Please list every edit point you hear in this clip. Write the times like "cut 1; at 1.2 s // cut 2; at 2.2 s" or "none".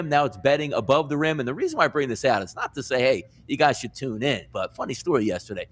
none